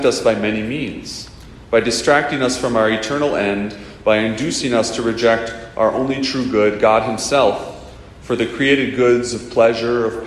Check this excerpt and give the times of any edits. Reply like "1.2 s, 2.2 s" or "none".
none